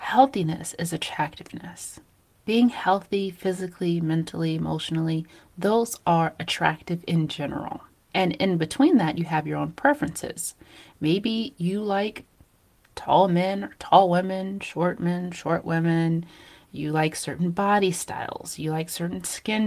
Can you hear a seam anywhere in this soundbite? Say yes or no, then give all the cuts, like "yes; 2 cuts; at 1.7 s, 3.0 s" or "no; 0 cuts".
yes; 1 cut; at 8.1 s